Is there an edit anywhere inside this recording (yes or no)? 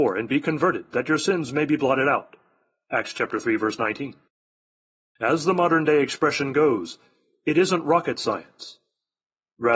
yes